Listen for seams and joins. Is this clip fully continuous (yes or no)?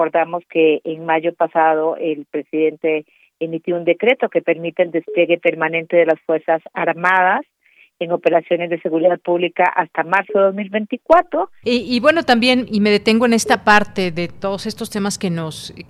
no